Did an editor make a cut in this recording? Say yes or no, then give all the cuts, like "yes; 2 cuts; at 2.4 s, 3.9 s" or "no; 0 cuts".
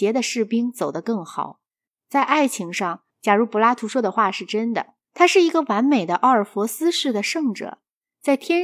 yes; 3 cuts; at 1.9 s, 3.1 s, 5.0 s